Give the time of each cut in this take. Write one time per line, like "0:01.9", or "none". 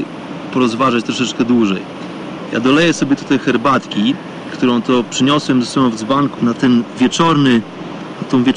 0:02.5
0:06.4